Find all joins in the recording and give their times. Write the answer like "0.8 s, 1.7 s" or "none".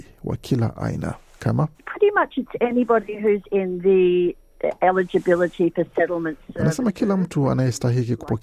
1.7 s